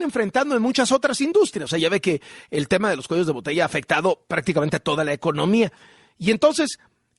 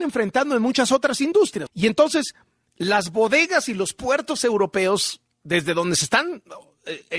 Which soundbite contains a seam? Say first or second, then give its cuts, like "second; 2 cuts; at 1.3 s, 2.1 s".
second; 1 cut; at 1.7 s